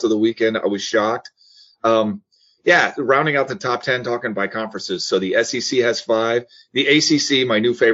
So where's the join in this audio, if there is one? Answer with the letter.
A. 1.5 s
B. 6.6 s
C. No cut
C